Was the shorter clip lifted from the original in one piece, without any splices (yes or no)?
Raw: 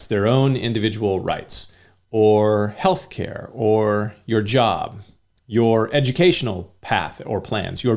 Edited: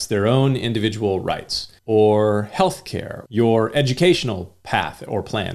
no